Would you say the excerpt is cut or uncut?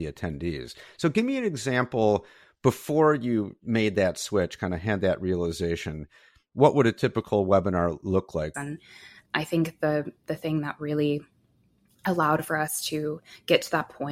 cut